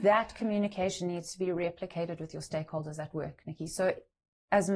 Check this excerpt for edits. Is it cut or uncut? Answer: uncut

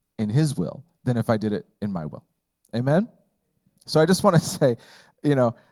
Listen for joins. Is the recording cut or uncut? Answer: uncut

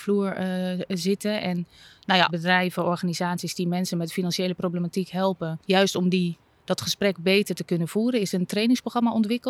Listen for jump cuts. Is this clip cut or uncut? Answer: cut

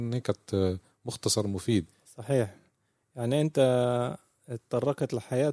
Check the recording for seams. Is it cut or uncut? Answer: uncut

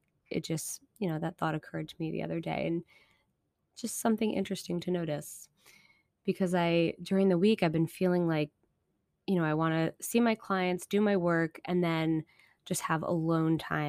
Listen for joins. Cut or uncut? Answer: uncut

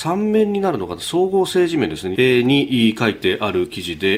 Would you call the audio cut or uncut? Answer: cut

